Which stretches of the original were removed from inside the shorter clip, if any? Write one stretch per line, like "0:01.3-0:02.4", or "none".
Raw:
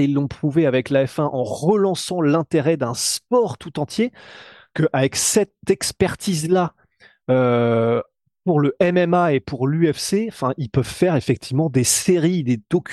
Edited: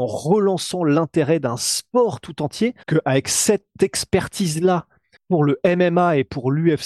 0:04.2-0:04.7
0:07.0-0:08.3